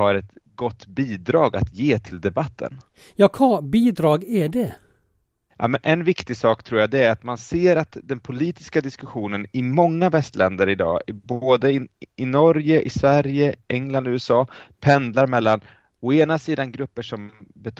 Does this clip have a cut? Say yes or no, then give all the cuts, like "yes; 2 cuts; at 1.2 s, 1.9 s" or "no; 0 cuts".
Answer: no; 0 cuts